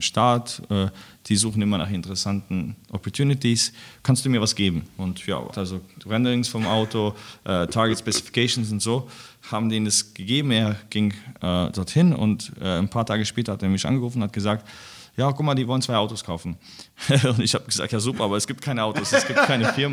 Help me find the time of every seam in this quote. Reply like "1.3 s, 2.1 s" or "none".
5.5 s